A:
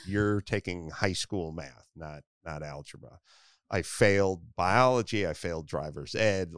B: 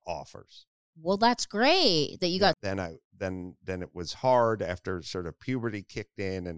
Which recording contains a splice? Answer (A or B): B